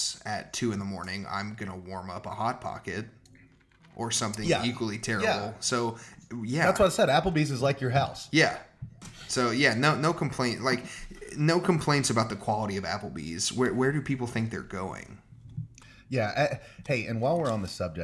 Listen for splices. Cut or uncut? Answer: uncut